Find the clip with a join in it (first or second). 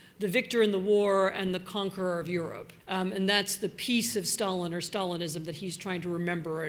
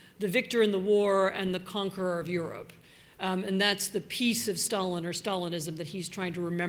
first